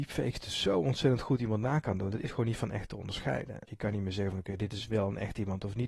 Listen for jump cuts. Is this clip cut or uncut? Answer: cut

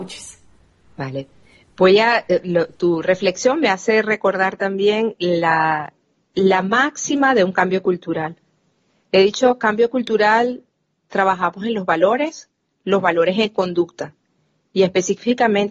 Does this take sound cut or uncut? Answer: uncut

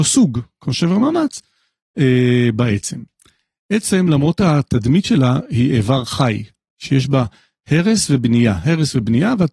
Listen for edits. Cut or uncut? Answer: uncut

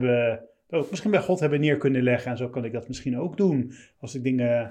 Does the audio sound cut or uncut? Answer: uncut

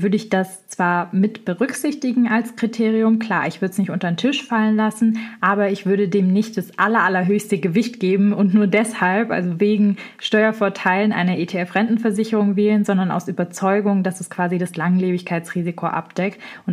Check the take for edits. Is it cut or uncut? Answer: uncut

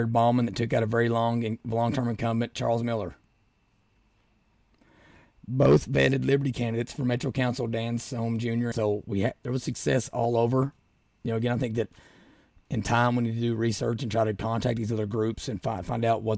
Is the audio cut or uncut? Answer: cut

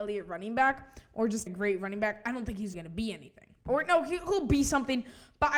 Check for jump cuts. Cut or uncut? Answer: cut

